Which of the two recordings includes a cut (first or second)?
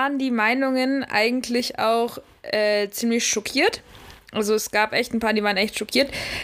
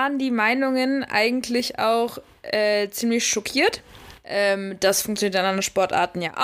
second